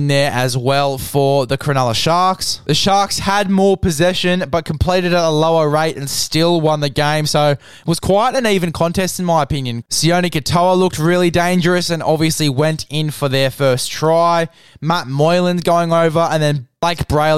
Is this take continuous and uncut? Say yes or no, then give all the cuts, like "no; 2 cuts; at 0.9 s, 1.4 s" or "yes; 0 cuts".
no; 1 cut; at 9.8 s